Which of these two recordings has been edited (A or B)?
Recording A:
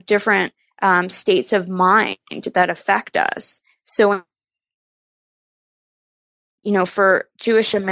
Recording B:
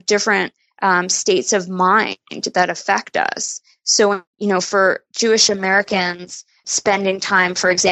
B